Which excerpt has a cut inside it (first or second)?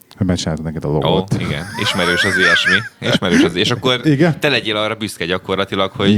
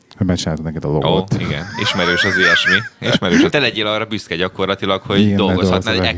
second